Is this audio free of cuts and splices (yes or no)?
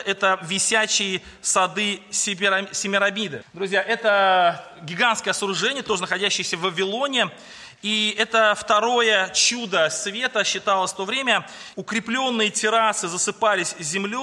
no